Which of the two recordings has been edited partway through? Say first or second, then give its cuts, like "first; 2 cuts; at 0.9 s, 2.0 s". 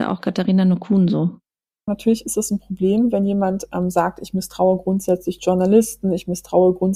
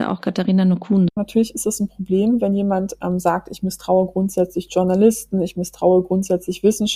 second; 1 cut; at 1.1 s